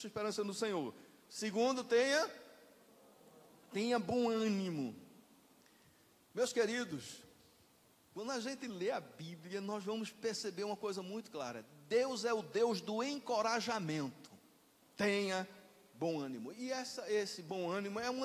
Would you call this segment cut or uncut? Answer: cut